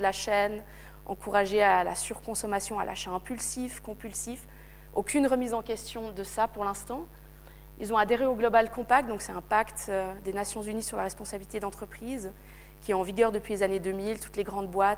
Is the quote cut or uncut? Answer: uncut